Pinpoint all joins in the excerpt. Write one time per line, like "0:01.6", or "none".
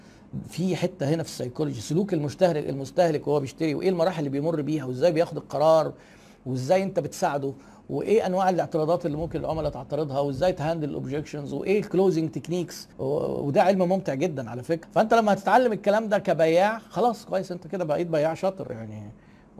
0:12.9